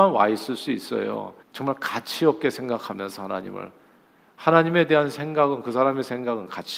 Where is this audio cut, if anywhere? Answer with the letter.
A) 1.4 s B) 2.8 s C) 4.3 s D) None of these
A